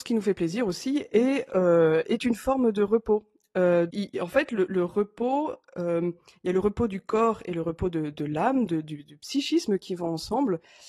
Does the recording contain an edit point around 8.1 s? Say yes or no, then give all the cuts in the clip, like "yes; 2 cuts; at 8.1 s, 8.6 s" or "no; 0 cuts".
no; 1 cut; at 3.9 s